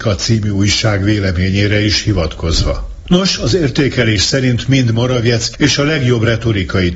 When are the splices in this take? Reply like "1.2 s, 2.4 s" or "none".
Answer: 3.1 s, 5.5 s